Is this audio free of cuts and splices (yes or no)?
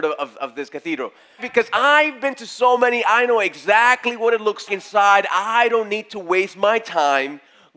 no